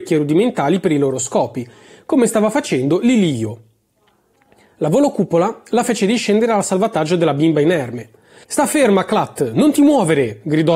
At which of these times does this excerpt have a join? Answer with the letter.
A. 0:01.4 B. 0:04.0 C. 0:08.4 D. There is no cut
C